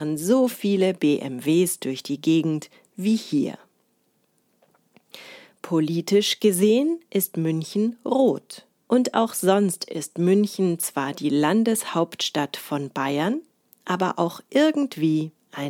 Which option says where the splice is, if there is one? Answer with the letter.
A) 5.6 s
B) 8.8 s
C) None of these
B